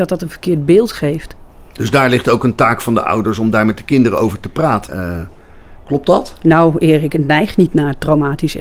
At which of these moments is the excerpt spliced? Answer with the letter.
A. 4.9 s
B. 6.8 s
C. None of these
A